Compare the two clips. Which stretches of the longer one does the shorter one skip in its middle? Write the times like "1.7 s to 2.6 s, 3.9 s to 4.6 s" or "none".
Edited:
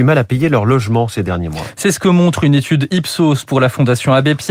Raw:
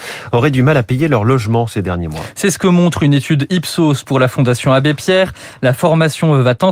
none